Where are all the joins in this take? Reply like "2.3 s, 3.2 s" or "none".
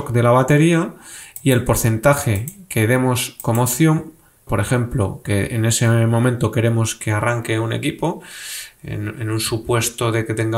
4.5 s